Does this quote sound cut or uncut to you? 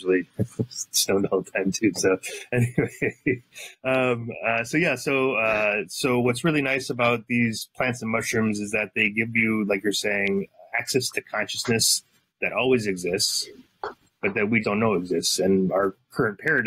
cut